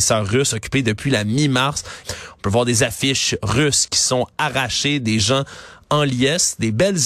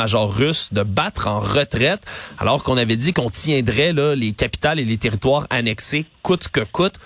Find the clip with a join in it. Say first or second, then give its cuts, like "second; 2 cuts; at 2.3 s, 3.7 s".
first; 1 cut; at 2.0 s